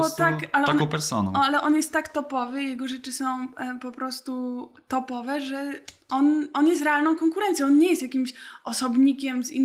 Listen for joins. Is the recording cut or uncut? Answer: uncut